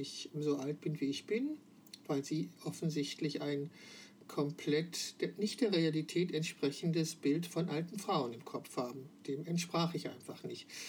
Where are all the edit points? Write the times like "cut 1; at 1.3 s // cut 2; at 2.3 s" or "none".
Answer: none